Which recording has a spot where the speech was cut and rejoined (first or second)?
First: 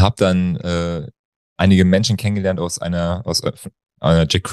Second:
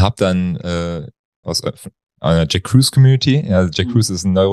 second